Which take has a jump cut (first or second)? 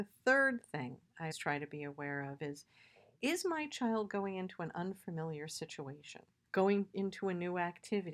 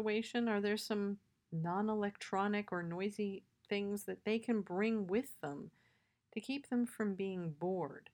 first